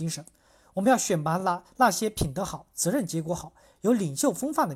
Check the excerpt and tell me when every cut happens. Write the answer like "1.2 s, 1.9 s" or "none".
none